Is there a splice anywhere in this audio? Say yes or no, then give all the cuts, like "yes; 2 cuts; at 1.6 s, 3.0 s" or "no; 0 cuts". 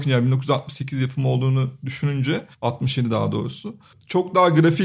yes; 1 cut; at 2.5 s